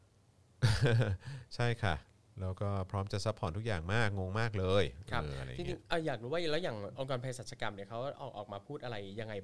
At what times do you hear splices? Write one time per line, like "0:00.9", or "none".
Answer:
none